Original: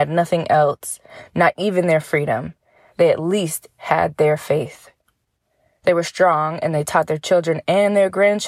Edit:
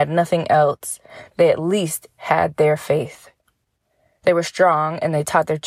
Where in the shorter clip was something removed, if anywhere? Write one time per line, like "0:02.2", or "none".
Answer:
0:01.3